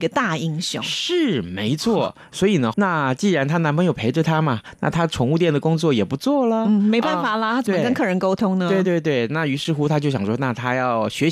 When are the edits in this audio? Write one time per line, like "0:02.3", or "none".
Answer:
0:02.7